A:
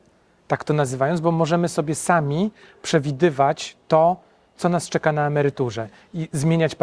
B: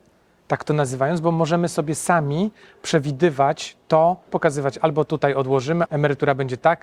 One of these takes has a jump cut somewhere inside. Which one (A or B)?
B